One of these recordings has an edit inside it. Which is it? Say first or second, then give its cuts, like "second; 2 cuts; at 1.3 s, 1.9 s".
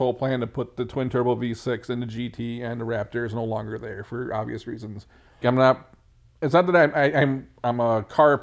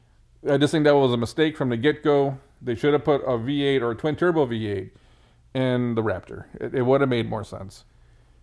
first; 1 cut; at 5.4 s